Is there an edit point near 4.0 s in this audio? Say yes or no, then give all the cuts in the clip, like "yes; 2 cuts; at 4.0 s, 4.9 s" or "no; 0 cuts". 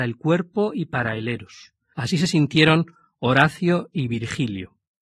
no; 1 cut; at 1.9 s